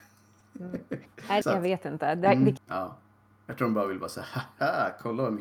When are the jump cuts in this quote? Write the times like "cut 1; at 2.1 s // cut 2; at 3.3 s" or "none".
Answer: cut 1; at 1.4 s // cut 2; at 2.6 s